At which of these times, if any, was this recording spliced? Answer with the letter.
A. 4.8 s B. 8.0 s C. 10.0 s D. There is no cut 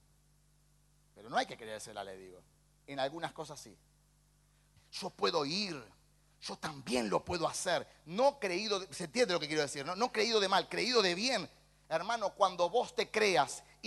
A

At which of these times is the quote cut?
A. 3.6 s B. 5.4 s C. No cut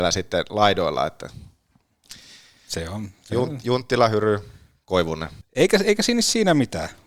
B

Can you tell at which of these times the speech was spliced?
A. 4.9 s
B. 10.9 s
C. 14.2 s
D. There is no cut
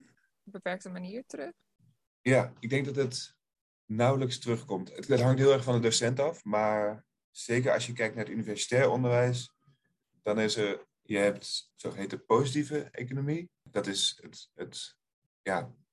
B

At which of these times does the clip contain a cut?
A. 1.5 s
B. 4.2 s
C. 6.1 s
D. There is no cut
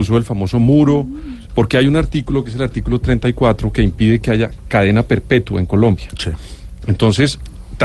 A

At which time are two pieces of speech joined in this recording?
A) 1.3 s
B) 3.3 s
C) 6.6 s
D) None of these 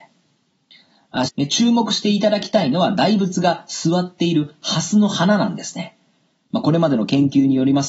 A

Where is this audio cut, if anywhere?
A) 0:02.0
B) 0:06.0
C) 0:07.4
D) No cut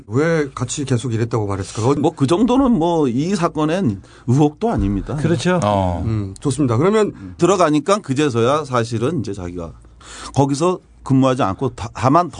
C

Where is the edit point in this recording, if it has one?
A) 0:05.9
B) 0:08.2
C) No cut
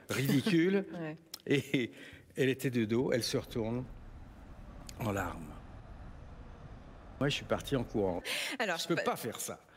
B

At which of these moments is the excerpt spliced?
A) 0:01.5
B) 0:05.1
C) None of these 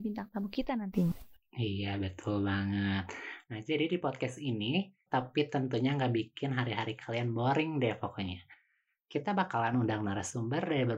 B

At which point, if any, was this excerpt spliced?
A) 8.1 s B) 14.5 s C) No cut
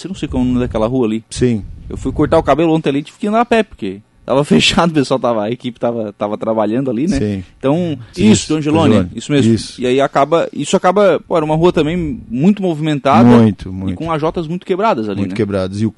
A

